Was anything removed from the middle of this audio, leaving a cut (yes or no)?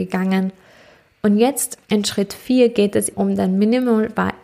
yes